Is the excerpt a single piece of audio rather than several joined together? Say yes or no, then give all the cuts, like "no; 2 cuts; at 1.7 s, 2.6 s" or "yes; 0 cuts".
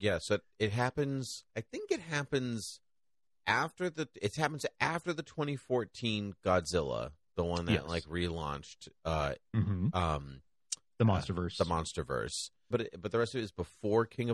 no; 2 cuts; at 1.5 s, 12.7 s